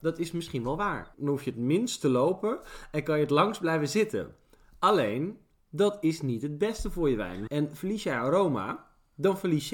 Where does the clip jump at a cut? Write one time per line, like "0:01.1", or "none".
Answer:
0:01.1
0:07.5